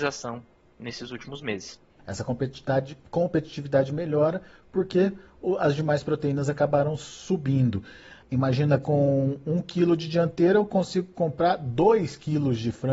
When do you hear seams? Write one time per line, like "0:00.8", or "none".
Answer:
0:02.0
0:08.2